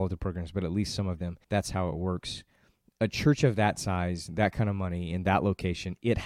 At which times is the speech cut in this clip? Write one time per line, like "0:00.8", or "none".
0:01.4